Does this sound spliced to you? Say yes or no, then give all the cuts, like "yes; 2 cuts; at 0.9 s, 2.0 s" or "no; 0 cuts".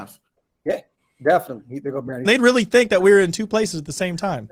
yes; 1 cut; at 2.2 s